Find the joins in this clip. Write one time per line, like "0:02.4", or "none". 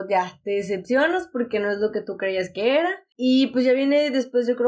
none

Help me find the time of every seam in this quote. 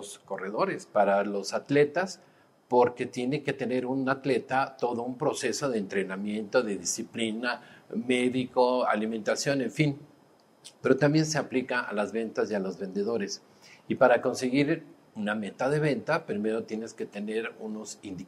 none

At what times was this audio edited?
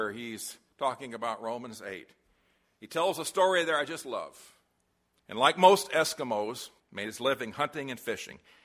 0:05.2
0:06.8

